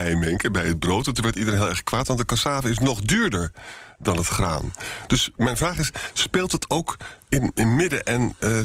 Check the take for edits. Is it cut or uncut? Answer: uncut